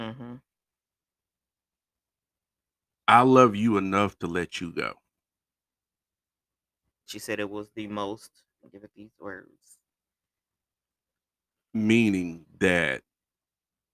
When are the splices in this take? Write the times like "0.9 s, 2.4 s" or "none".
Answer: 7.1 s, 8.6 s, 11.5 s